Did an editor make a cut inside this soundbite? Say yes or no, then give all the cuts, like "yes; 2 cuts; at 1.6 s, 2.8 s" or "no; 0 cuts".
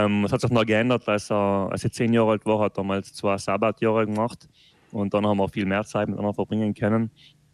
no; 0 cuts